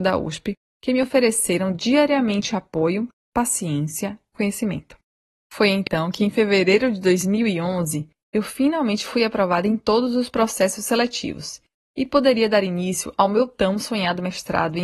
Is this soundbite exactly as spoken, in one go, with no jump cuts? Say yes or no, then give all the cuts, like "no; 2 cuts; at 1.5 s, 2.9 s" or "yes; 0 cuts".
no; 1 cut; at 4.3 s